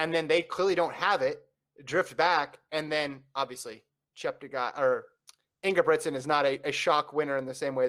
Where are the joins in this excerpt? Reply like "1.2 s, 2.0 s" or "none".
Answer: none